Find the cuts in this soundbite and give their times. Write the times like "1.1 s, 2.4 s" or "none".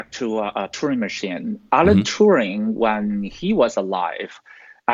none